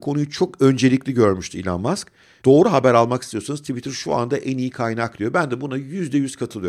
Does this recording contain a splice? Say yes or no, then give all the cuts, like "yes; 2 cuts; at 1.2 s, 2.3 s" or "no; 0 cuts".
yes; 1 cut; at 2.4 s